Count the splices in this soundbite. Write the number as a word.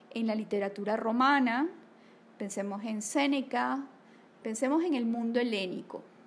one